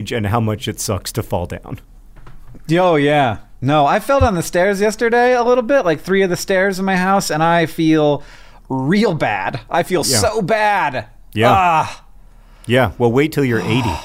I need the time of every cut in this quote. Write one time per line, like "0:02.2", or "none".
none